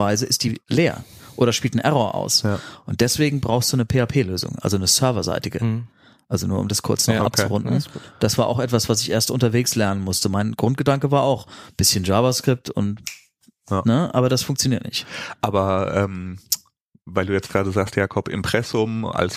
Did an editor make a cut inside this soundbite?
no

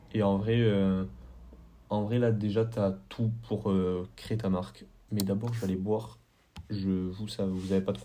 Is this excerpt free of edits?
no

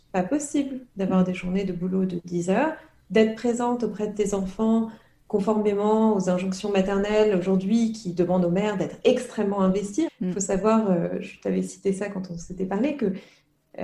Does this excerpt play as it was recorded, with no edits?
no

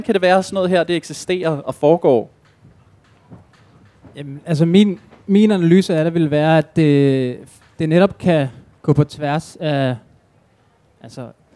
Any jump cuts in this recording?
no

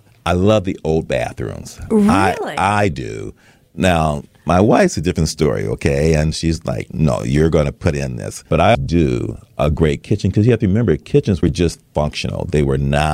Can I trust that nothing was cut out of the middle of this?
no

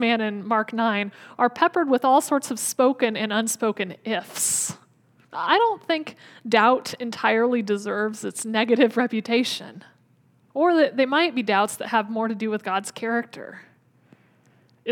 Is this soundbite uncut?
no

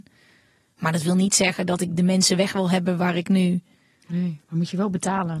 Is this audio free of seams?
yes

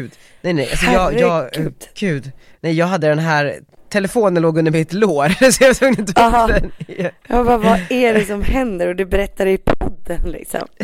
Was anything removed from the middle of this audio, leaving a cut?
no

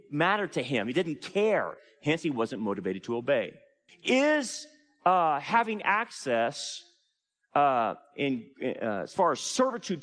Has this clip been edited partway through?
yes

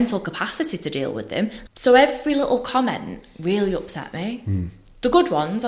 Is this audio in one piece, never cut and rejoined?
no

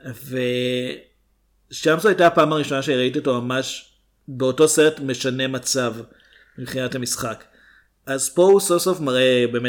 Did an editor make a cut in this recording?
no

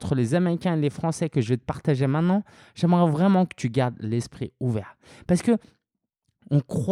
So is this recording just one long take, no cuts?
yes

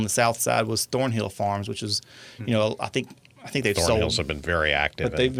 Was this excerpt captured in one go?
yes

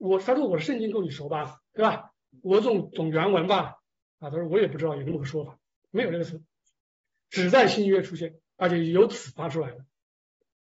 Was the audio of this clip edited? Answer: no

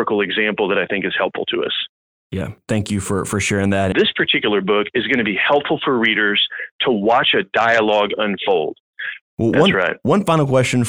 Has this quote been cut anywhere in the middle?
yes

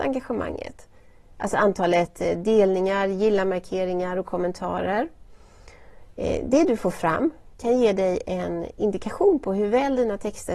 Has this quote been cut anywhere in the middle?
no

